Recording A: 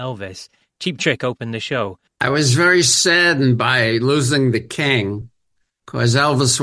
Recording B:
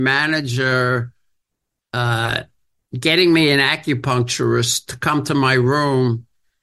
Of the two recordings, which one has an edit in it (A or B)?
A